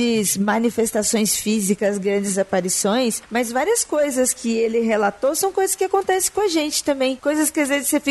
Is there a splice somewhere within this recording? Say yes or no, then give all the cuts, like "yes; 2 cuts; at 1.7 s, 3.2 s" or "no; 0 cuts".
no; 0 cuts